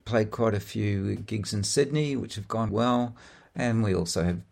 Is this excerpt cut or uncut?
cut